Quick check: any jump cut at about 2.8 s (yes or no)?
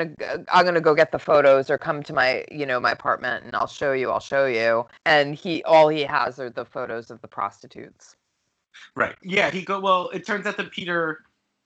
no